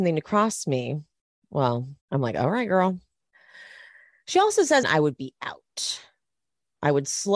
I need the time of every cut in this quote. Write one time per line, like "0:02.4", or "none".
0:02.0
0:04.8